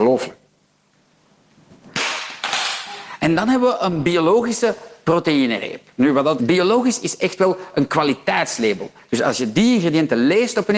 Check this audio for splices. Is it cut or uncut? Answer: cut